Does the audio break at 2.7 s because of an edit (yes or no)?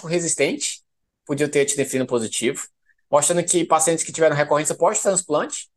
no